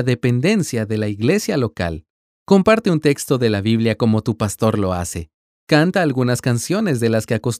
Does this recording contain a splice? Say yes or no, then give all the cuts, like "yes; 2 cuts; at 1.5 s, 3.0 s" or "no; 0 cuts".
no; 0 cuts